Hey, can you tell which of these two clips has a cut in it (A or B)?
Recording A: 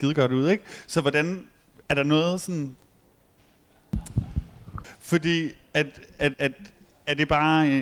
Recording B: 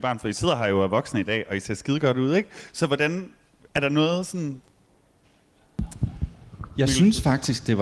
A